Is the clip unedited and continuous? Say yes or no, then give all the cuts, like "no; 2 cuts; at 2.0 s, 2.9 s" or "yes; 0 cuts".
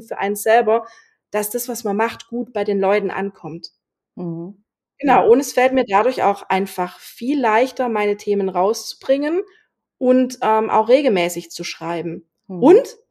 yes; 0 cuts